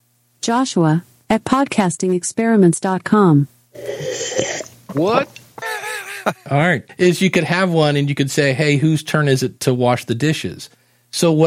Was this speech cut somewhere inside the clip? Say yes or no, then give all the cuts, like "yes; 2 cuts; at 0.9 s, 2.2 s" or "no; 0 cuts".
yes; 1 cut; at 5.6 s